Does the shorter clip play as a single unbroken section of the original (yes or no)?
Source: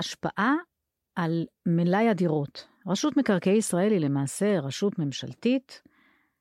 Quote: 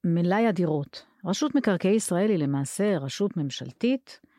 yes